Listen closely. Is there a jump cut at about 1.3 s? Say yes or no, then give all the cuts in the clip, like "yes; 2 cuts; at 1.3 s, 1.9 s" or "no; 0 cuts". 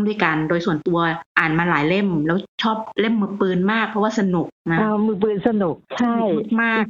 no; 1 cut; at 4.6 s